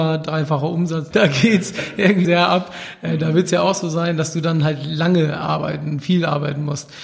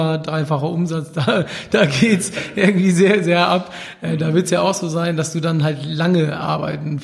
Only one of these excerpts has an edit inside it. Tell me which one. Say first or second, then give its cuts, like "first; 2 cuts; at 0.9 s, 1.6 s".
first; 2 cuts; at 1.1 s, 2.2 s